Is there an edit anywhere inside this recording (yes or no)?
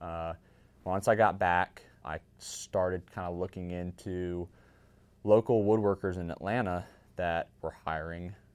yes